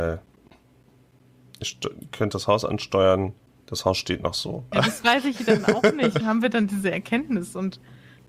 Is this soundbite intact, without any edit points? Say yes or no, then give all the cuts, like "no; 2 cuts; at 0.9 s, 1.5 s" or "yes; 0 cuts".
no; 2 cuts; at 4.7 s, 6.2 s